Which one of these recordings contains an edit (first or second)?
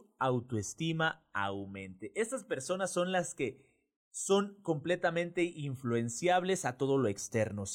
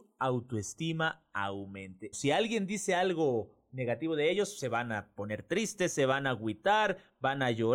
second